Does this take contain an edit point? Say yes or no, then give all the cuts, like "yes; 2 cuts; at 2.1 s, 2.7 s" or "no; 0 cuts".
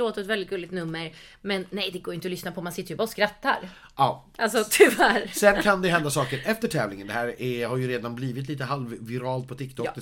no; 0 cuts